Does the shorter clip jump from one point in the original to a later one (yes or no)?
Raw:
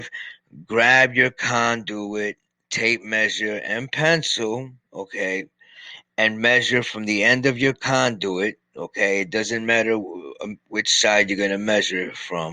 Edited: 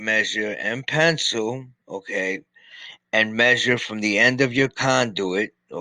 no